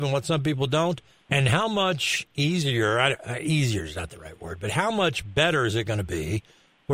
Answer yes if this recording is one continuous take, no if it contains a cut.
no